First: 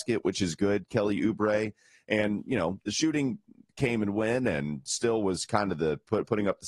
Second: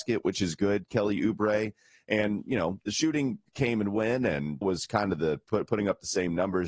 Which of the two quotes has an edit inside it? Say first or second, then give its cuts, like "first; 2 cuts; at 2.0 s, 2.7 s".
second; 2 cuts; at 3.5 s, 4.6 s